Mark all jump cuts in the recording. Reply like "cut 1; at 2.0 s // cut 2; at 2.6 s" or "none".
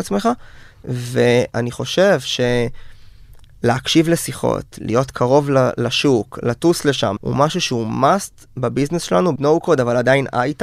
cut 1; at 7.2 s // cut 2; at 9.4 s

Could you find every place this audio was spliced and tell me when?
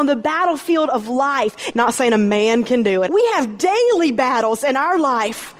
cut 1; at 1.7 s // cut 2; at 3.1 s

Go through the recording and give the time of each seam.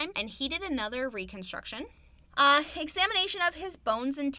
cut 1; at 2.3 s

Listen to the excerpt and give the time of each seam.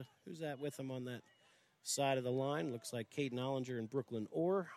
none

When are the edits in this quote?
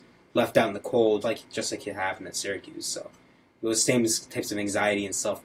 cut 1; at 1.2 s

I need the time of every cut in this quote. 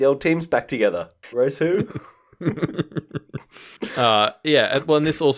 cut 1; at 1.3 s

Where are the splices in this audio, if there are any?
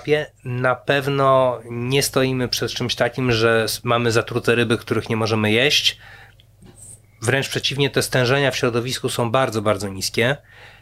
none

